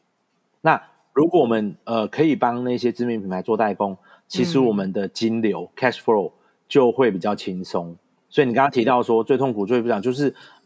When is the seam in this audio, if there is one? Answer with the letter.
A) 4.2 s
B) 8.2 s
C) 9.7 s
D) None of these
D